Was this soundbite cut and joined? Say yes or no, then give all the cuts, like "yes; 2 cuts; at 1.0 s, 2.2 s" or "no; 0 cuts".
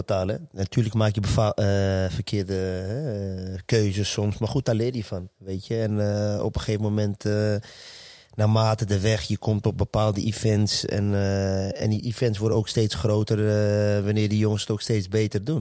no; 0 cuts